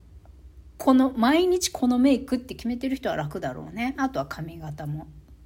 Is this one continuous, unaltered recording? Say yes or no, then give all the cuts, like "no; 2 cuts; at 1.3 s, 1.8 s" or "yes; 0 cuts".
no; 1 cut; at 3.9 s